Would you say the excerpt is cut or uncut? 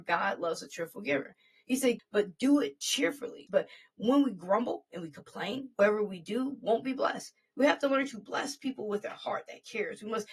cut